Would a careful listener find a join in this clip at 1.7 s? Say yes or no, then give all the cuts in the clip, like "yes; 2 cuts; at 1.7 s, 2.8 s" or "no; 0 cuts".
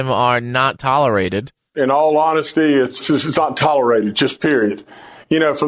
no; 1 cut; at 3.0 s